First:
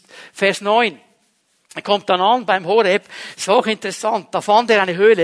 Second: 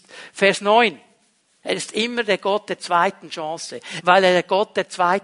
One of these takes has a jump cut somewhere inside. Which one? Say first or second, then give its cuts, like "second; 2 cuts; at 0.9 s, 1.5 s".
second; 2 cuts; at 1.6 s, 4.0 s